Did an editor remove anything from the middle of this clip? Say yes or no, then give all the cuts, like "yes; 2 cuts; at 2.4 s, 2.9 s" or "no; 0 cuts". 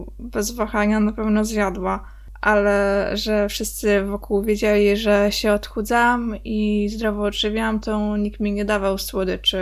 no; 0 cuts